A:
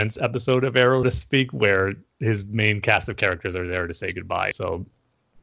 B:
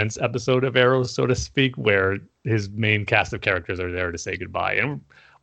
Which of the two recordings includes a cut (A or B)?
A